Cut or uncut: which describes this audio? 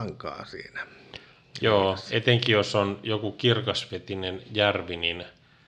uncut